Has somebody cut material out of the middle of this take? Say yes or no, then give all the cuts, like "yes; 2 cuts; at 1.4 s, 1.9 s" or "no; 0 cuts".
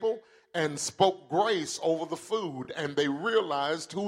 no; 0 cuts